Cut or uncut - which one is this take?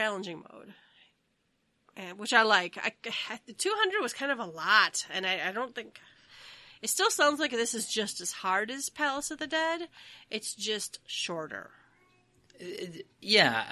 uncut